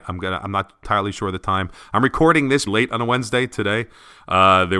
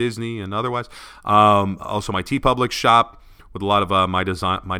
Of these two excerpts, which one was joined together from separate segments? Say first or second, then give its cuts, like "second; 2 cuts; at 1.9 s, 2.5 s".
first; 1 cut; at 2.7 s